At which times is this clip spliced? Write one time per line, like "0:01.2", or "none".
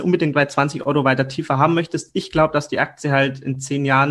none

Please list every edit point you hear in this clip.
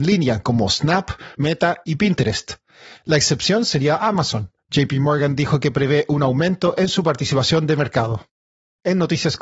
0:01.3

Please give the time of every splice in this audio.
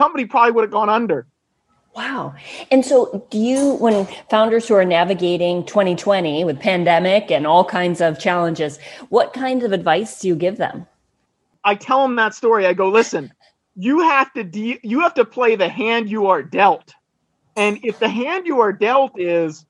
none

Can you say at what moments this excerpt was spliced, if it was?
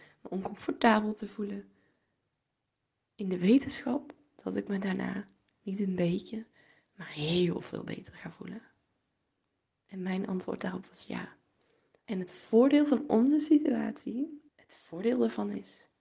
0:12.0
0:14.5

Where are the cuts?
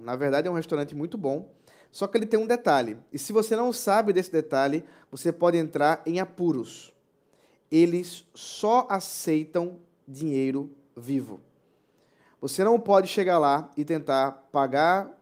none

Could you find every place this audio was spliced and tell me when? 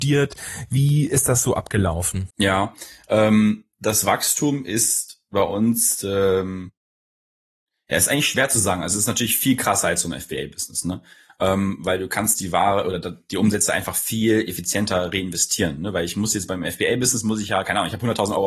0:02.3

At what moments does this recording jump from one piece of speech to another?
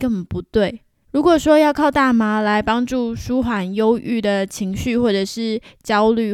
0:01.0

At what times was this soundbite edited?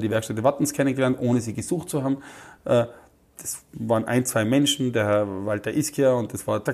none

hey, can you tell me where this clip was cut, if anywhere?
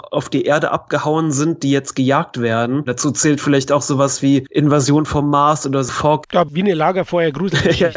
0:02.9
0:06.2

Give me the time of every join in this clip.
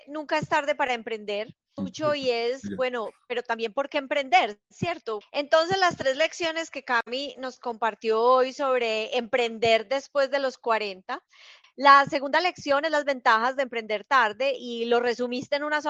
0:01.8
0:05.2
0:11.6

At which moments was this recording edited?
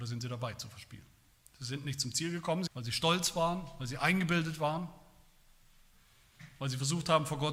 0:02.7

